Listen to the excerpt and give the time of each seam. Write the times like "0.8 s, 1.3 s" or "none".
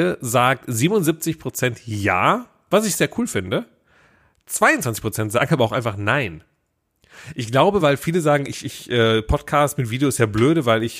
none